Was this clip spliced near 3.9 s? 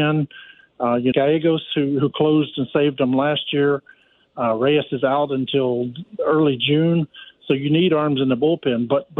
no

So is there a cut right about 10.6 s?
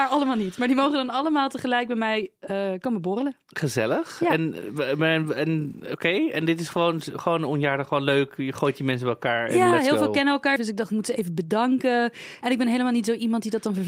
yes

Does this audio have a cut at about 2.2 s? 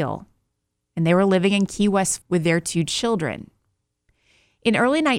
yes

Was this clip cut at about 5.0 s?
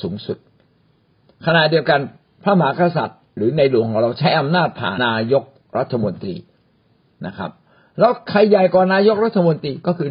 yes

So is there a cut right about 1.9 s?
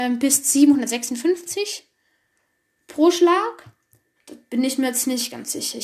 no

